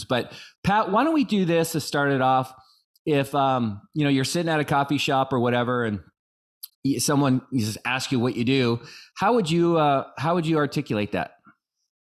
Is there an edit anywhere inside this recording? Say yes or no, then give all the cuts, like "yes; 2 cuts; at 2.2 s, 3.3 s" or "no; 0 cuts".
no; 0 cuts